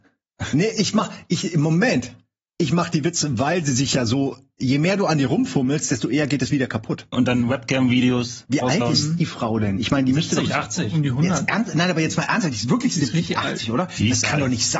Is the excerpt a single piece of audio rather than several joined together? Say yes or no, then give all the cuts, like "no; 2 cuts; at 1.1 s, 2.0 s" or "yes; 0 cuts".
no; 1 cut; at 7.1 s